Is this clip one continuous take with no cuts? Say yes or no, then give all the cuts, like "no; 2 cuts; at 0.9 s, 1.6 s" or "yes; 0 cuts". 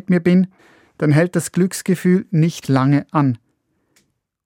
no; 1 cut; at 2.6 s